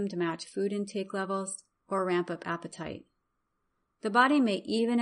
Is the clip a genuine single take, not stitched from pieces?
no; 1 cut; at 1.8 s

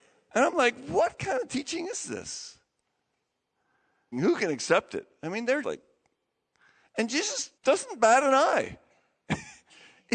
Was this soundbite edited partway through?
yes; 3 cuts; at 4.1 s, 5.6 s, 7.6 s

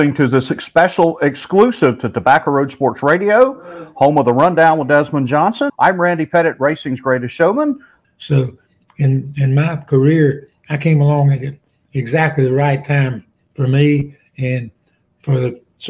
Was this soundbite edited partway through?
yes; 2 cuts; at 5.7 s, 8.0 s

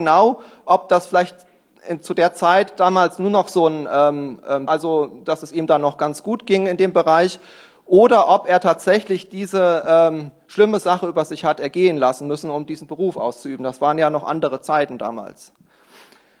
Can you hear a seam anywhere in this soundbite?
yes; 1 cut; at 4.7 s

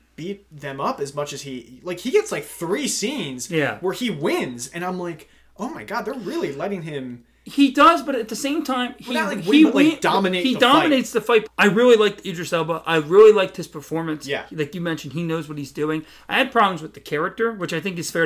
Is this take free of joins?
no; 1 cut; at 11.5 s

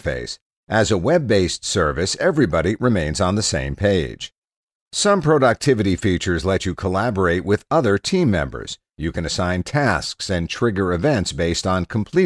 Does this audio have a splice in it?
yes; 1 cut; at 8.9 s

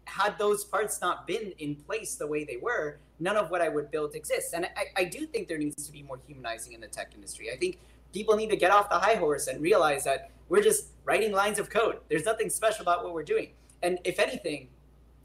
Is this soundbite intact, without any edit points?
yes; 0 cuts

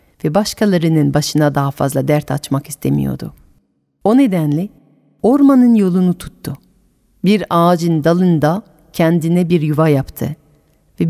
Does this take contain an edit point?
no; 0 cuts

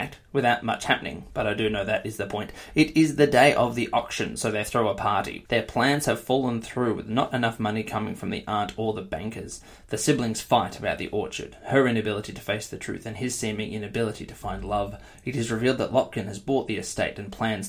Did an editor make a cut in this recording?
yes; 1 cut; at 5.5 s

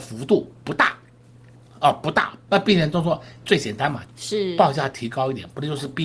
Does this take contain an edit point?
yes; 2 cuts; at 2.5 s, 4.0 s

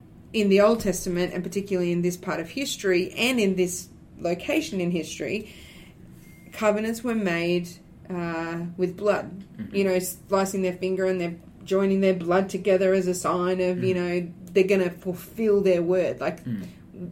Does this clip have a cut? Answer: yes; 1 cut; at 9.7 s

